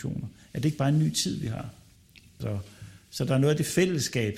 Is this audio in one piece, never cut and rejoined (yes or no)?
no